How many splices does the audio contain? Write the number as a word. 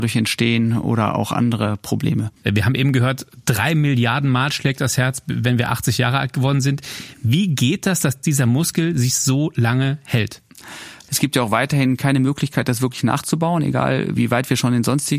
two